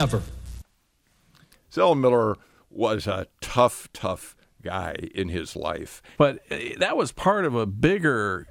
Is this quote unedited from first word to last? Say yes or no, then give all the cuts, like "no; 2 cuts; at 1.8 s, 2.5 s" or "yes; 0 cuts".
no; 2 cuts; at 1.5 s, 6.2 s